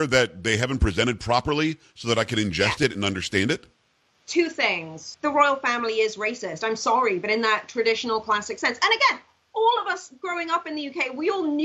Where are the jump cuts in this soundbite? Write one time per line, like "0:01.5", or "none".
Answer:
none